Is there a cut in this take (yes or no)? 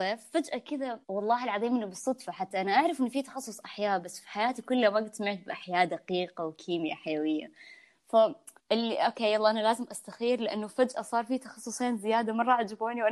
yes